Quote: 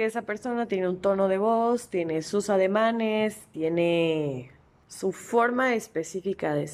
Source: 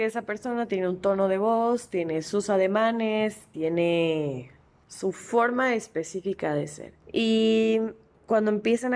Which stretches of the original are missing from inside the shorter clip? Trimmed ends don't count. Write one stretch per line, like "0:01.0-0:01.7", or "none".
none

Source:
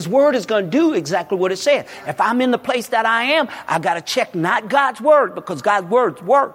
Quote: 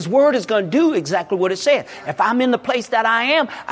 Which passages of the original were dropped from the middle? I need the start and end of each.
none

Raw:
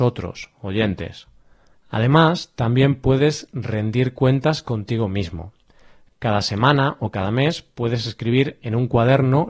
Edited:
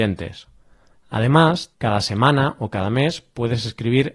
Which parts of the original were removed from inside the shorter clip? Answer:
0:02.5-0:06.1

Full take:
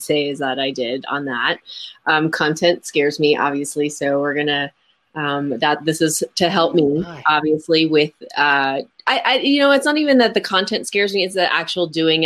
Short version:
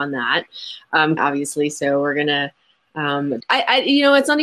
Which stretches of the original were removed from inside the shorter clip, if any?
0:02.3-0:03.4
0:05.6-0:09.0

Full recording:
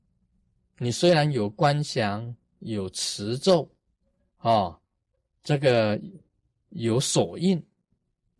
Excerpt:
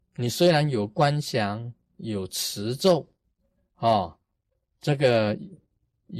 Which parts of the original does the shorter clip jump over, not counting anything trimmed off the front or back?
none

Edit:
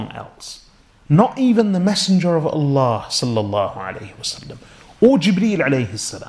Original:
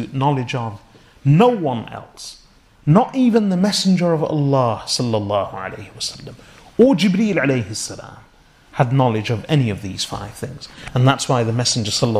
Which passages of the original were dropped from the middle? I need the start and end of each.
none

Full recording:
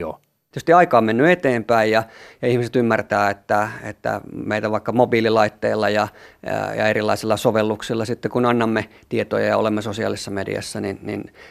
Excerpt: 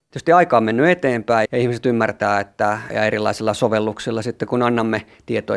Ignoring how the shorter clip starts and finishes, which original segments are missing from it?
0:01.9-0:02.4
0:03.8-0:06.7

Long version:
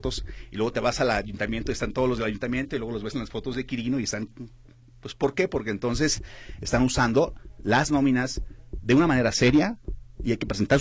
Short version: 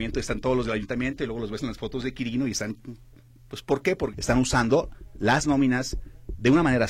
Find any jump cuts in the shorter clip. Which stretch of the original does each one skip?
0:05.6-0:06.6

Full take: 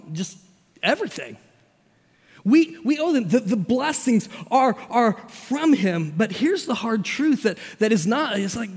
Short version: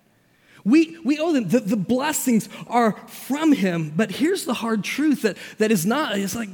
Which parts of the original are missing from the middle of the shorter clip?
0:04.5-0:04.9

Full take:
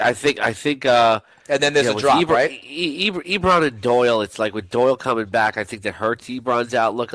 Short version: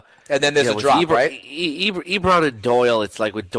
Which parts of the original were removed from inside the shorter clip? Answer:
none

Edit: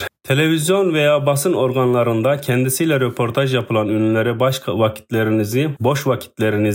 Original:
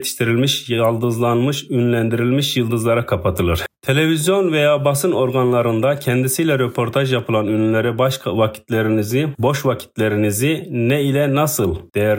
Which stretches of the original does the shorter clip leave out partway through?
none

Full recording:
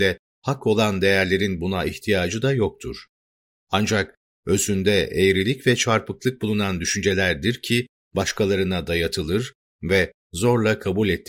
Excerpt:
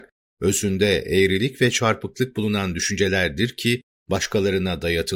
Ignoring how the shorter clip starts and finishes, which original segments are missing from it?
none

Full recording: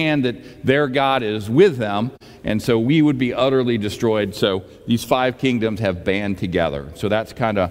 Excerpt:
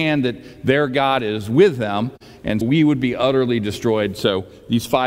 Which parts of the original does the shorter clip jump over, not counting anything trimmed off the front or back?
0:02.6-0:02.8

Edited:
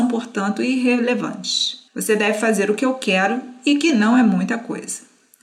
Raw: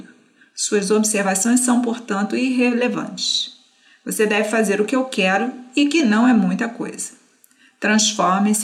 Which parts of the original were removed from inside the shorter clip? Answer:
0:03.6-0:04.0

